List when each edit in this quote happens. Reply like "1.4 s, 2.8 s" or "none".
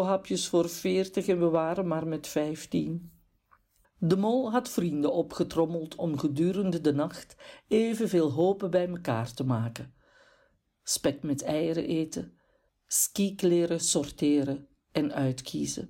3.8 s, 12.7 s